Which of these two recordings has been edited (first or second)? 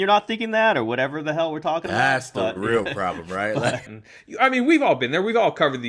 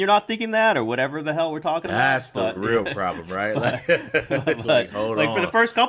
first